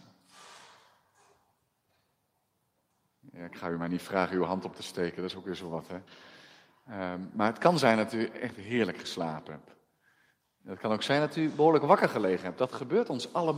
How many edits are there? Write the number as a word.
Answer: zero